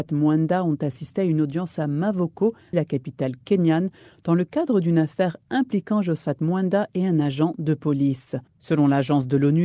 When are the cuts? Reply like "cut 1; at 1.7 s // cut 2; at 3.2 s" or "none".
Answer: cut 1; at 2.7 s // cut 2; at 8.5 s